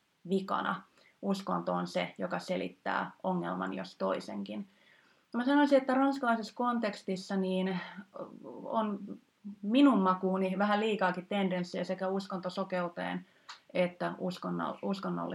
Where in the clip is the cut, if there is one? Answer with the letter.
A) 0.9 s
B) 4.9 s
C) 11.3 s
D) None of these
D